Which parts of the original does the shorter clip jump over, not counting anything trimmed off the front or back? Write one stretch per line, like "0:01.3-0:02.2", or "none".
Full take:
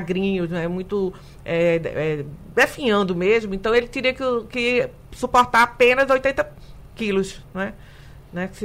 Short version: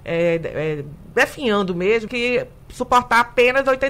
0:03.5-0:04.5